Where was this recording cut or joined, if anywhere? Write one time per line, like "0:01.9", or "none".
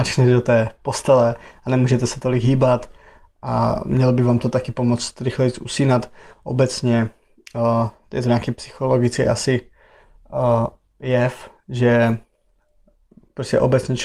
none